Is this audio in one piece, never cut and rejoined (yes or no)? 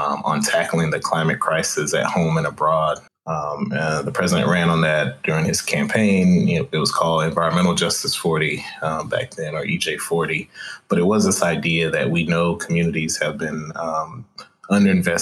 no